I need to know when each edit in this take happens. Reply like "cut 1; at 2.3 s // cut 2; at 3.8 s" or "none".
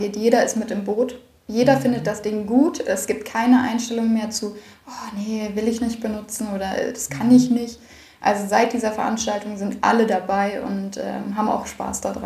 none